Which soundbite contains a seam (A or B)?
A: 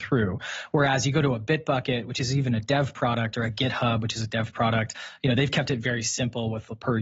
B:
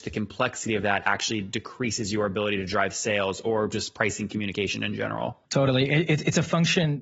B